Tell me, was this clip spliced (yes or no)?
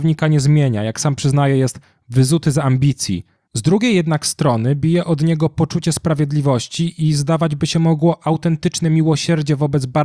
yes